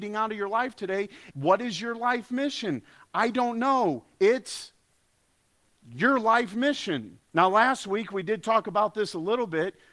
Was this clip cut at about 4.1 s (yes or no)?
no